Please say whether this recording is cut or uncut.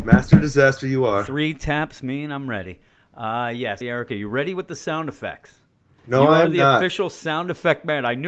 cut